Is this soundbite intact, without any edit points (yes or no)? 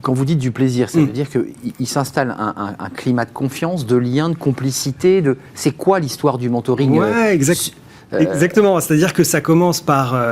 yes